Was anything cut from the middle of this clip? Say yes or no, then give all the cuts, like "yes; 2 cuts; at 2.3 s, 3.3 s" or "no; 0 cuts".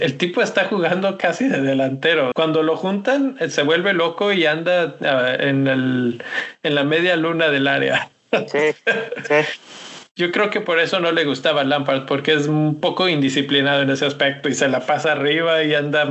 yes; 1 cut; at 2.3 s